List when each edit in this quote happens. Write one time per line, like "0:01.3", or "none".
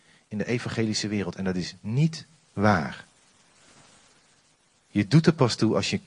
none